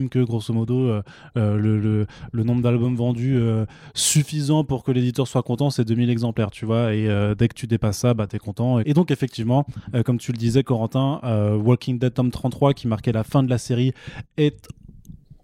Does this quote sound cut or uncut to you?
cut